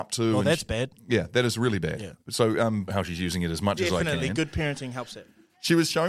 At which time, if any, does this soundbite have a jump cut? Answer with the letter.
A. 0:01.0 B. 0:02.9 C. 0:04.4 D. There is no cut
B